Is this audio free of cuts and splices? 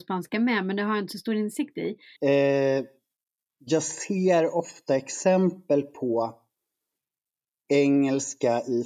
no; 1 cut; at 2.2 s

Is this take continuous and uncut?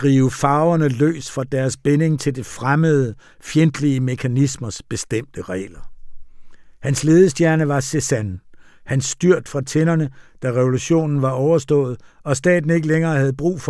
yes; 0 cuts

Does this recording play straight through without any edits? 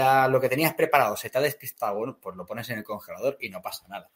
yes; 0 cuts

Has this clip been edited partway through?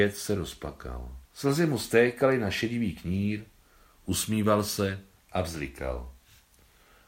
yes; 1 cut; at 1.2 s

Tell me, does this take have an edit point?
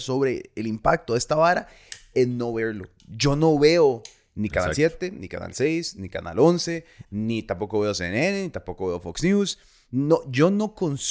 no; 0 cuts

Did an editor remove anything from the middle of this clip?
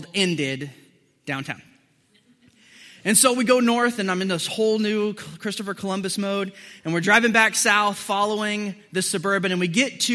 no; 0 cuts

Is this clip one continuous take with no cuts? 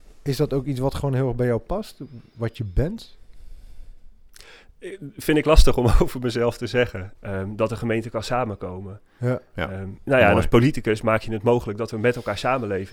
no; 1 cut; at 7.2 s

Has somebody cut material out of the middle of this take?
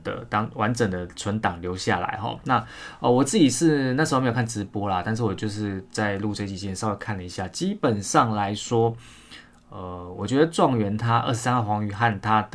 no; 0 cuts

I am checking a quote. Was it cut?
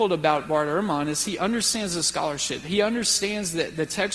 no; 0 cuts

